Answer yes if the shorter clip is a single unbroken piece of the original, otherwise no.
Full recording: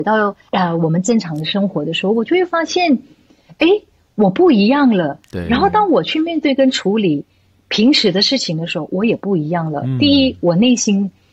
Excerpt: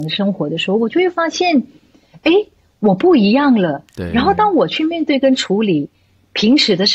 yes